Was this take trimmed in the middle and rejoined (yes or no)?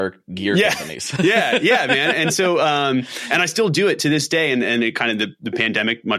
no